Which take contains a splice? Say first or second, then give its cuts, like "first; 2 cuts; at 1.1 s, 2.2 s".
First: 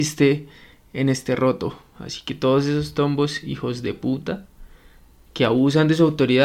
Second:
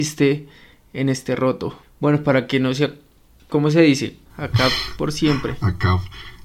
second; 2 cuts; at 1.8 s, 4.3 s